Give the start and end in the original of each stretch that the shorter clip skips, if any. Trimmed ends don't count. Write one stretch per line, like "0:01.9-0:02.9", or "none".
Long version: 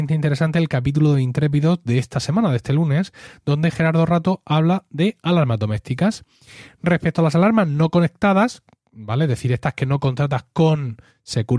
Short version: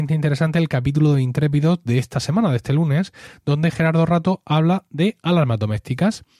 none